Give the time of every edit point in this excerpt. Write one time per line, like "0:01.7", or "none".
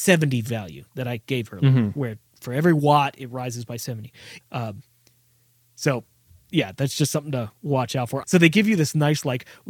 0:04.4
0:08.2

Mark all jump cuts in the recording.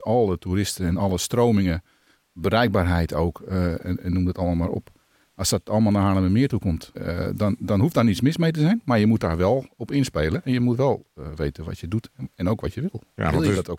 0:06.9

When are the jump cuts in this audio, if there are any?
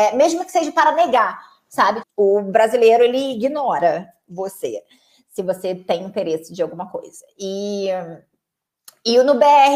0:02.0

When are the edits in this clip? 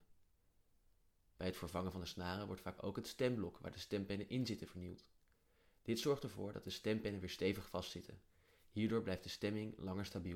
none

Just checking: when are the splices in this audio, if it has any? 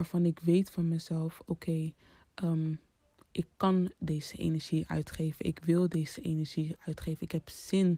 none

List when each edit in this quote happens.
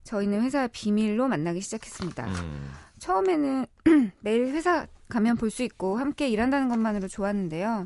none

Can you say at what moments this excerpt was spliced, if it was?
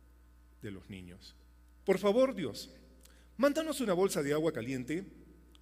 0:01.8

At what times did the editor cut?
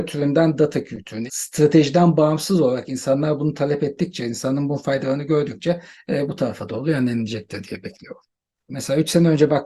0:01.3
0:08.7

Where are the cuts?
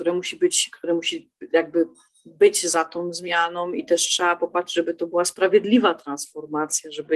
none

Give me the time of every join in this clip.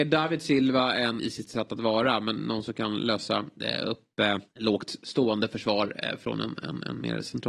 0:01.2
0:02.4
0:04.5

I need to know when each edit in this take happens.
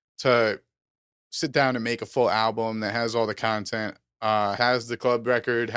0:04.6

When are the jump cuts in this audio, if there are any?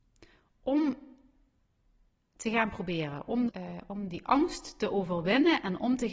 0:03.5

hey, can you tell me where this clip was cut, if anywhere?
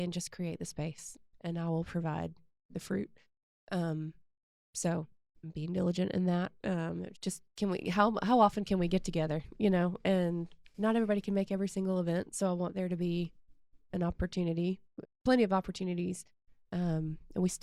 0:07.1
0:15.0
0:16.7

